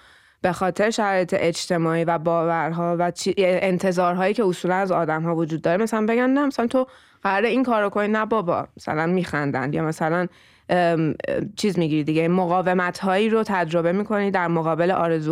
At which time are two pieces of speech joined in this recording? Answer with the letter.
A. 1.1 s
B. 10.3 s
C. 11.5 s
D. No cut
C